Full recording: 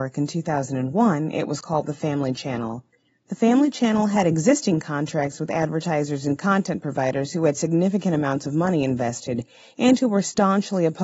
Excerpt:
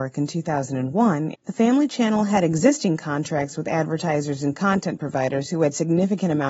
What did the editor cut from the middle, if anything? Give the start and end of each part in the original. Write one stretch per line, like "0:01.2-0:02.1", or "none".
0:01.3-0:03.2